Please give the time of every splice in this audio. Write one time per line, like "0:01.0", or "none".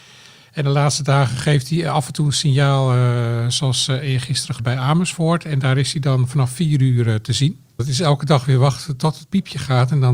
0:04.6
0:07.8